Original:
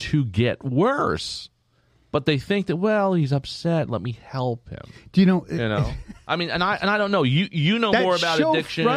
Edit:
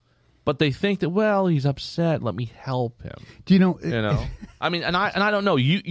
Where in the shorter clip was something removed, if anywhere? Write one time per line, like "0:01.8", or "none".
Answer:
none